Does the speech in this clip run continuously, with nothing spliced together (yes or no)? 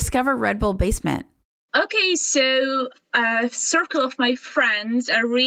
yes